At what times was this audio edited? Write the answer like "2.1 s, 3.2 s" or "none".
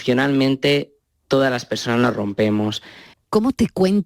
3.1 s